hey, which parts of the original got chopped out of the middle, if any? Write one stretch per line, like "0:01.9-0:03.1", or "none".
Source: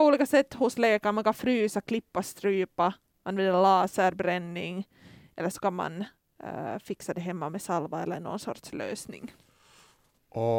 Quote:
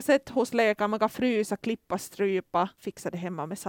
0:03.0-0:06.8